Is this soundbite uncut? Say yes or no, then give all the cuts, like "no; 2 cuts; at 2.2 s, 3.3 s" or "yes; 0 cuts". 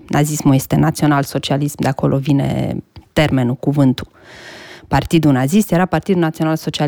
yes; 0 cuts